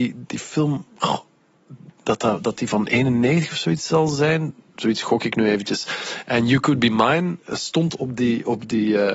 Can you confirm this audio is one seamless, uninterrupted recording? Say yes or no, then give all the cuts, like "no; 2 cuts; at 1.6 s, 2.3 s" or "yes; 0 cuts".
yes; 0 cuts